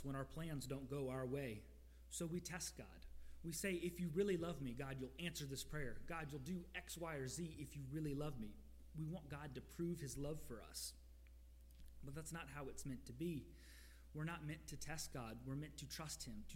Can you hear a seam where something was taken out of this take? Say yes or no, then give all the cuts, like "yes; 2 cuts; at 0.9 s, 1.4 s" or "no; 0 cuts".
no; 0 cuts